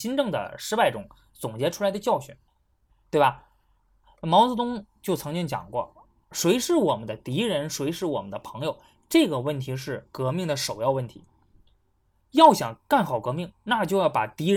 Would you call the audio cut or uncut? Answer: cut